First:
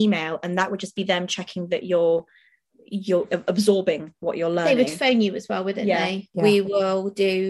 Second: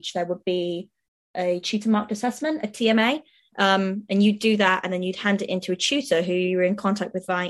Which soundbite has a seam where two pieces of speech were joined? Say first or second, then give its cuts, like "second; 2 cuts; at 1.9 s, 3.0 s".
first; 1 cut; at 6.3 s